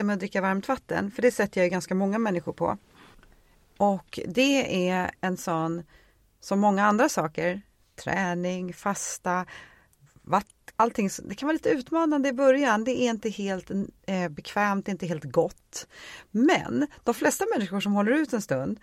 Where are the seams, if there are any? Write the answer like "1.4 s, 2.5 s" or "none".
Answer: 10.7 s